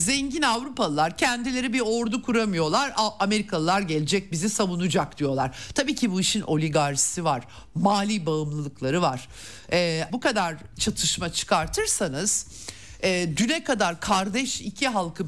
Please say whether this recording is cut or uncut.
cut